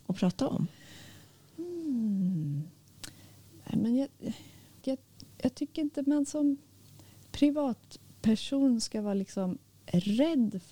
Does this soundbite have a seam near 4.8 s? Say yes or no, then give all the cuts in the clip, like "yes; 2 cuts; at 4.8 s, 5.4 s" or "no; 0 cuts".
yes; 1 cut; at 4.8 s